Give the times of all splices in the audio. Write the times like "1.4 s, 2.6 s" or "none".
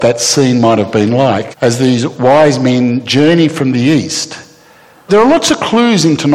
1.5 s, 5.1 s

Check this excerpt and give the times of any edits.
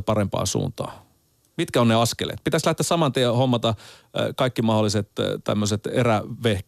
none

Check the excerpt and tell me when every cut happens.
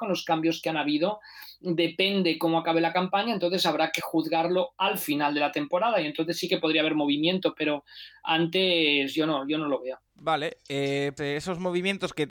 10.1 s, 11.2 s

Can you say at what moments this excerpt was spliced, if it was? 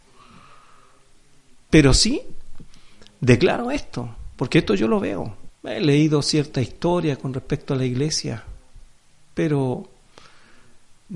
1.7 s, 5.5 s

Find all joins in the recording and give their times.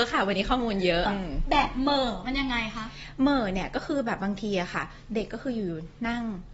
1.1 s

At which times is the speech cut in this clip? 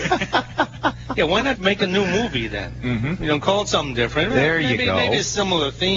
1.6 s

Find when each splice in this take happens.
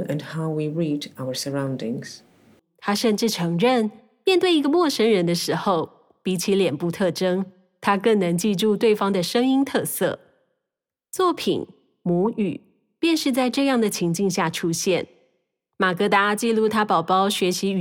2.6 s

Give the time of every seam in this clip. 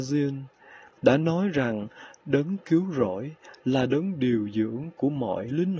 1.0 s

